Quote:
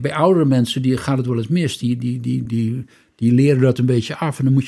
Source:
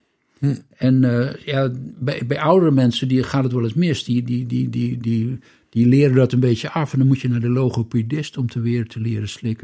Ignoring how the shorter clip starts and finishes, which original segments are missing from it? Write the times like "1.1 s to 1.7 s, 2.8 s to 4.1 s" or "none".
4.7 s to 5.0 s